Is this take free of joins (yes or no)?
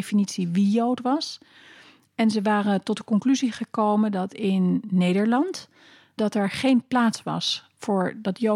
no